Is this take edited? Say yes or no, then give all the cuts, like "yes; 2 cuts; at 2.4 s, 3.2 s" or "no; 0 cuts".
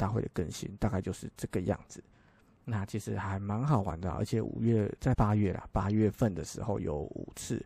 yes; 1 cut; at 5.1 s